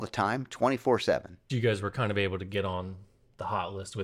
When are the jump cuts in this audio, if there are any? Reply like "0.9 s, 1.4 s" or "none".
1.5 s